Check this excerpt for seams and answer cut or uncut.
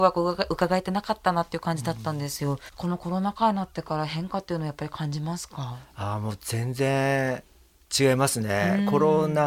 cut